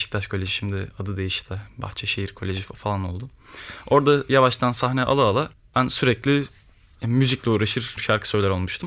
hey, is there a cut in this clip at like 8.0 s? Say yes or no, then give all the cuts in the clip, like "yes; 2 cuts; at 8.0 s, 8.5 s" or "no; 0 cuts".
yes; 1 cut; at 8.0 s